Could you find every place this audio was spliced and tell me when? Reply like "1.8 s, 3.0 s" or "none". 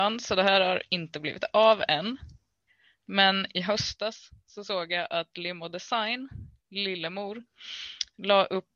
none